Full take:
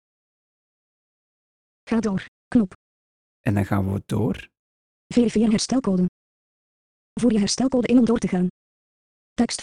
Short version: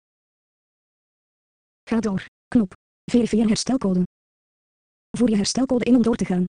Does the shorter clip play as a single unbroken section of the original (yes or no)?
no